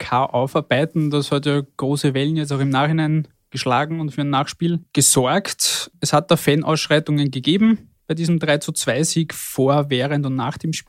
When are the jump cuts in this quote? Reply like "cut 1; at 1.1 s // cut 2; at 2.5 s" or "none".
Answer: none